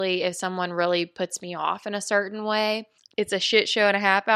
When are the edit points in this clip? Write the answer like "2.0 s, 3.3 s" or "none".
3.1 s

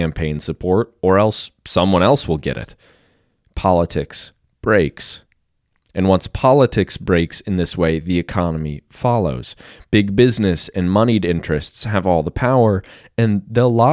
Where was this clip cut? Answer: none

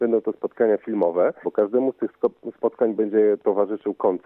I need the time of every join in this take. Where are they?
1.4 s

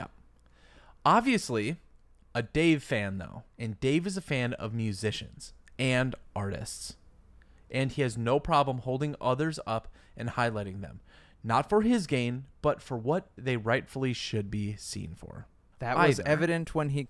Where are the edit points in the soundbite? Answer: 3.5 s, 15.7 s

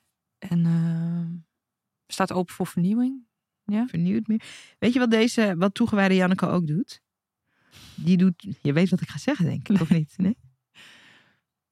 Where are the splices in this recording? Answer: none

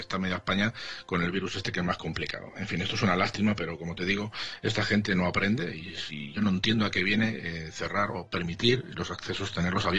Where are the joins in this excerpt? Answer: none

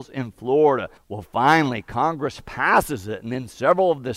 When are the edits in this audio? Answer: 1.0 s

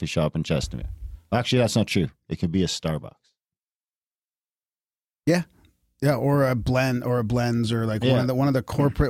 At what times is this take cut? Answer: none

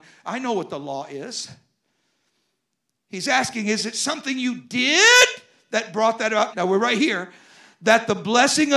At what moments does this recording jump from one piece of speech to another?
6.5 s

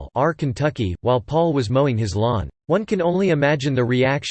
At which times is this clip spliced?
2.6 s

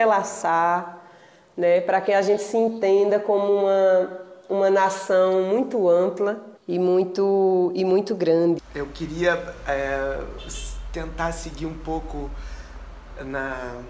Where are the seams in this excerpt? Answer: 6.6 s, 8.6 s

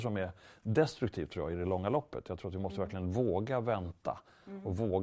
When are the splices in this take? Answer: none

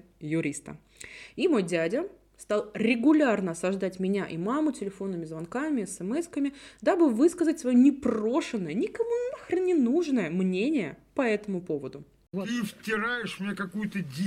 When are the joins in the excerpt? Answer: none

